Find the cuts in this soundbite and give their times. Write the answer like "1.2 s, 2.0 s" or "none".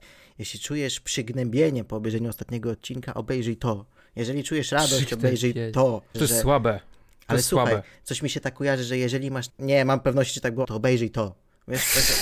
6.1 s, 9.5 s, 10.6 s